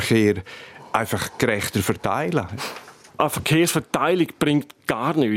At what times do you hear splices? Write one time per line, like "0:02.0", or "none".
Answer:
0:03.1